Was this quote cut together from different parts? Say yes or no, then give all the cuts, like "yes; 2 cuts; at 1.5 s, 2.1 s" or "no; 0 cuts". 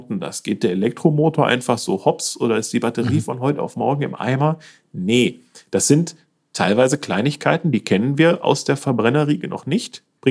no; 0 cuts